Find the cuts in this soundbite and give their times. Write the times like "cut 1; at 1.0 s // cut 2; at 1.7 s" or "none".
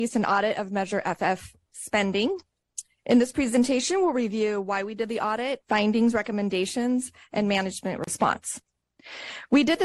cut 1; at 5.6 s